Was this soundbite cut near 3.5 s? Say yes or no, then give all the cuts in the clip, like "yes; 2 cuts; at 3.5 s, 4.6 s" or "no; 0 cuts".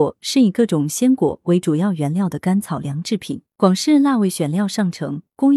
yes; 1 cut; at 3.5 s